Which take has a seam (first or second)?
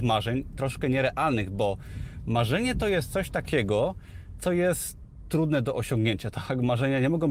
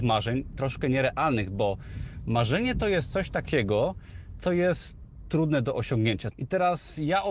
second